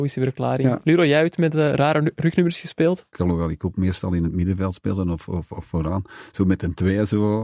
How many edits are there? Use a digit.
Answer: 1